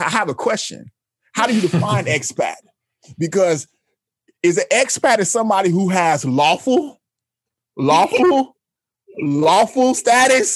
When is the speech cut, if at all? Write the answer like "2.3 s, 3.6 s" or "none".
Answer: none